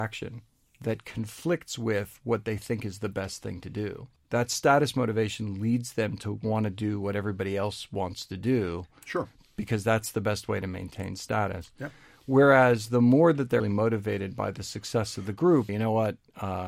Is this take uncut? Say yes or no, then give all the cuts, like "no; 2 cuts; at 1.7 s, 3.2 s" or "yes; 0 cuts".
no; 2 cuts; at 13.6 s, 15.7 s